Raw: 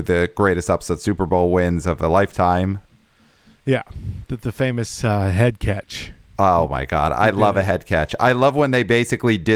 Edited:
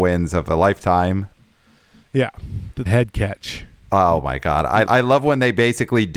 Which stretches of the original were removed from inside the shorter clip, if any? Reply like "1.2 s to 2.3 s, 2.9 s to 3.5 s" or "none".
4.4 s to 5.3 s, 7.3 s to 8.2 s